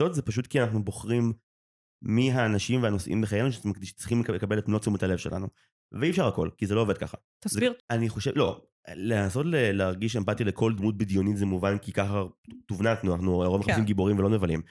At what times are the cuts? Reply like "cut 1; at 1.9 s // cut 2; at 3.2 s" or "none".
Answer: cut 1; at 7.8 s